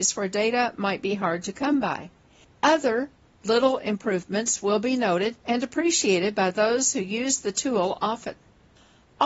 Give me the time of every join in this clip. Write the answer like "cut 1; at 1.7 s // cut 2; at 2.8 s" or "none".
cut 1; at 2.4 s // cut 2; at 5.4 s